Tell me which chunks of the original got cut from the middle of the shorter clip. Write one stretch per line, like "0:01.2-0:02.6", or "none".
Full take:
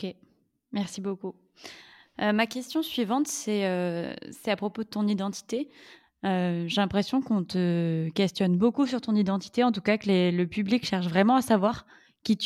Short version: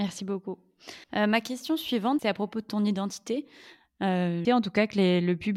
0:01.8-0:02.1
0:03.2-0:04.4
0:06.7-0:09.6